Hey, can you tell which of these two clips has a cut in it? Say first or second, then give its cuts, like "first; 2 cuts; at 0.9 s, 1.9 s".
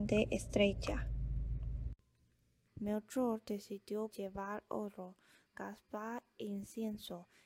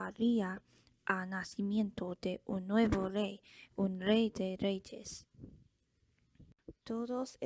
first; 2 cuts; at 2.7 s, 4.1 s